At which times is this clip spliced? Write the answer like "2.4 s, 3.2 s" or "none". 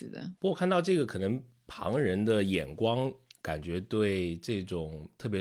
none